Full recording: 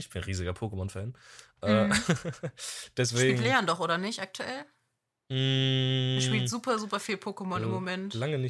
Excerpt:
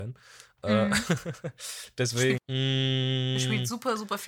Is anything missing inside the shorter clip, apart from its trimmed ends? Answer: yes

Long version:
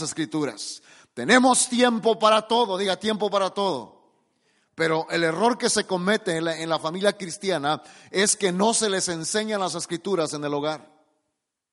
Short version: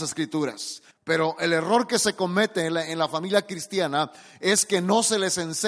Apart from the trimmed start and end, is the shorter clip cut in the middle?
yes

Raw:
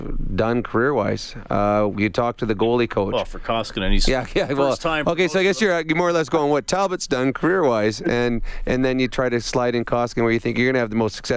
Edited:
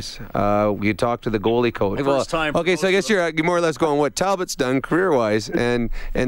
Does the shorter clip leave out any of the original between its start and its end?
yes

